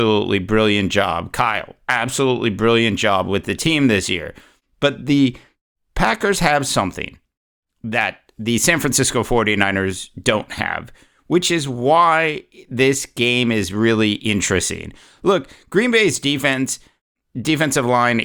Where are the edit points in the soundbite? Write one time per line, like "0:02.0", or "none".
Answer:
none